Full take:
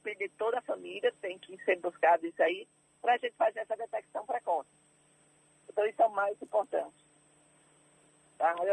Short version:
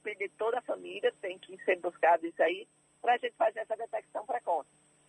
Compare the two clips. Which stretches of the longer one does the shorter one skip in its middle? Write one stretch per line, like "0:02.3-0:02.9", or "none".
none